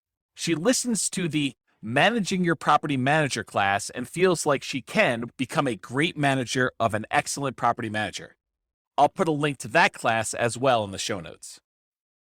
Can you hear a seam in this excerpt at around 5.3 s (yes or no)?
yes